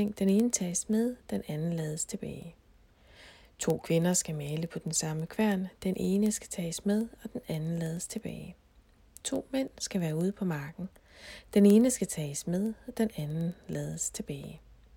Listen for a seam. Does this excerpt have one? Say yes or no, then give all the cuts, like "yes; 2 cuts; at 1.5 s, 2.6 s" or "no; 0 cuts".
no; 0 cuts